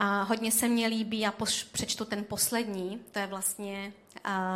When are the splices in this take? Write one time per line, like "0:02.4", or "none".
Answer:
none